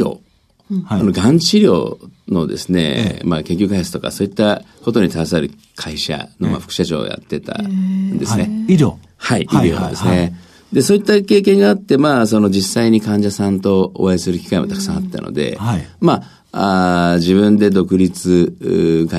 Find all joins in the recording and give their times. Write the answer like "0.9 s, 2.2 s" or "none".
none